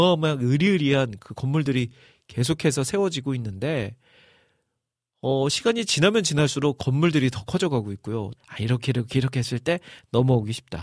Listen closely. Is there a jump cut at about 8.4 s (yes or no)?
yes